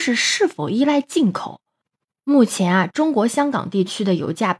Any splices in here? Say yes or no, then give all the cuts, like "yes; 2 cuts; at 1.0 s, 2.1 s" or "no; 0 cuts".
no; 0 cuts